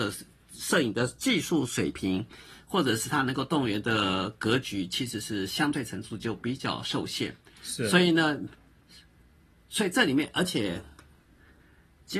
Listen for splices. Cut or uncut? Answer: uncut